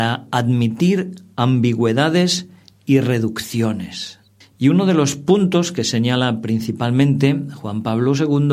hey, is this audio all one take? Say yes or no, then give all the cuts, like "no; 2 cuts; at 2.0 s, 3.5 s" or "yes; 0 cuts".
no; 1 cut; at 4.4 s